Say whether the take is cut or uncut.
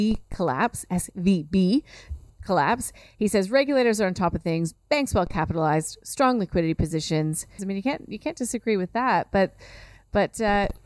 cut